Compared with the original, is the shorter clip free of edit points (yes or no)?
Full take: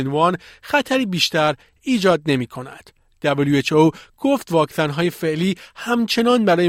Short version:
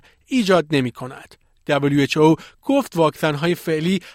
yes